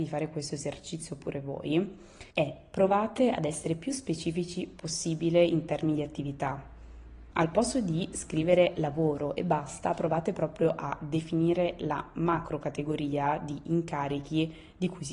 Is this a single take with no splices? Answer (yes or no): no